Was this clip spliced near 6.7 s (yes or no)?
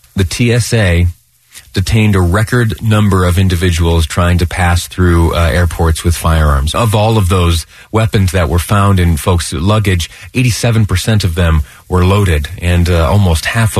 yes